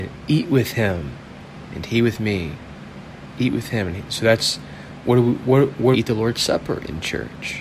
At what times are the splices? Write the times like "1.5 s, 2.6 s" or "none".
5.9 s